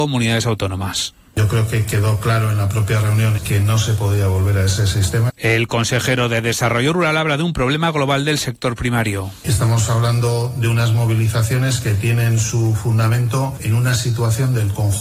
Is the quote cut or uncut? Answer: cut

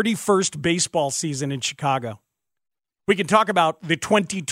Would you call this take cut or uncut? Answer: cut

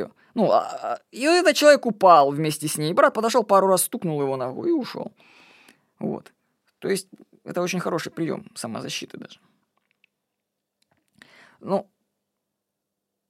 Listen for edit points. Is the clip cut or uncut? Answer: uncut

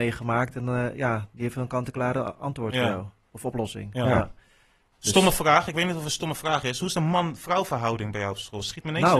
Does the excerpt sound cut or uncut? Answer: uncut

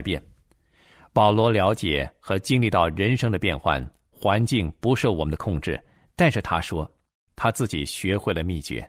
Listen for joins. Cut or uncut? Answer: uncut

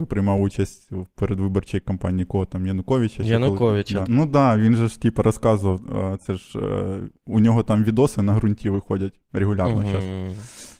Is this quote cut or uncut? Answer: cut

